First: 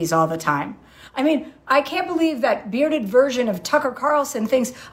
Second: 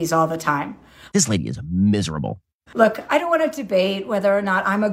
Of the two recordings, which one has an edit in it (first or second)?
second